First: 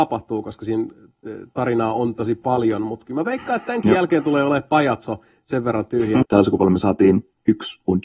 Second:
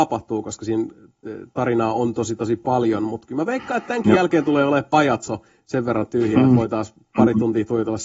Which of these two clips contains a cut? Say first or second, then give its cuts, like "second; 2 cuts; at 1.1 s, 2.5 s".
first; 2 cuts; at 2.1 s, 6.2 s